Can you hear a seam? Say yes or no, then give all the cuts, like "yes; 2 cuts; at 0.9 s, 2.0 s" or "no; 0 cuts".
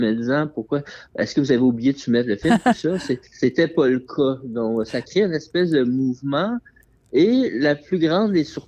yes; 1 cut; at 3.3 s